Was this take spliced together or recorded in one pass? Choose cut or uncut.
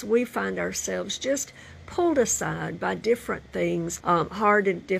cut